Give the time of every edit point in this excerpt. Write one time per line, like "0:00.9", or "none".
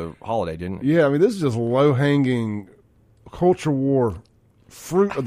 none